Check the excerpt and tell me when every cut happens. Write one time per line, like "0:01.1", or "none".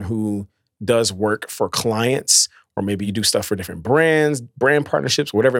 none